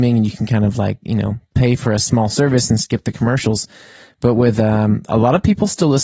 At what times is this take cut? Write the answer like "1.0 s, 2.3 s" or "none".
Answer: none